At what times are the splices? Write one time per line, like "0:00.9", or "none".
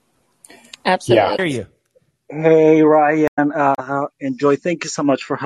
0:01.4